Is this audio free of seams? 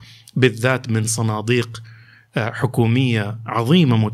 yes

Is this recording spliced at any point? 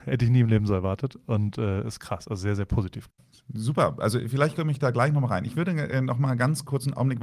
no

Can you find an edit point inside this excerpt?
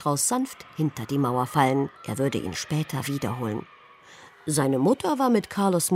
yes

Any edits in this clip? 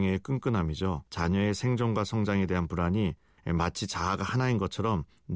yes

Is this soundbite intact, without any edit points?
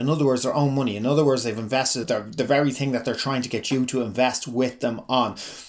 no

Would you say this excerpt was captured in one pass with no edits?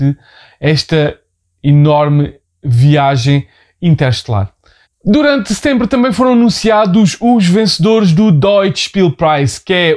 no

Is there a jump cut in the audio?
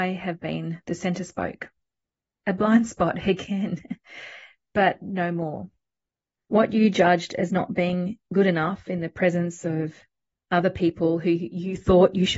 yes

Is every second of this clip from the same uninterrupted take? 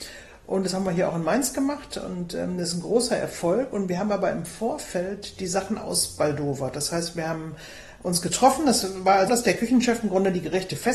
no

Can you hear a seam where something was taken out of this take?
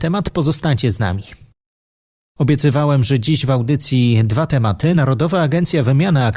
no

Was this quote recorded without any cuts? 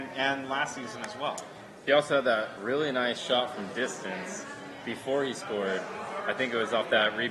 yes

